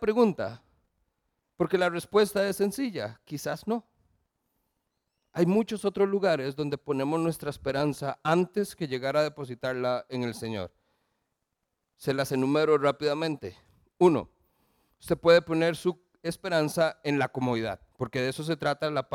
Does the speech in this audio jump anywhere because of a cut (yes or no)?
yes